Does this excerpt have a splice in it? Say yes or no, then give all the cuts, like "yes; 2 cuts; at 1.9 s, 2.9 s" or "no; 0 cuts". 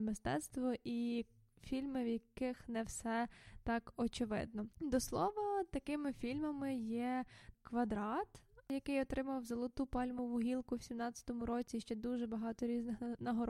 yes; 2 cuts; at 4.7 s, 7.5 s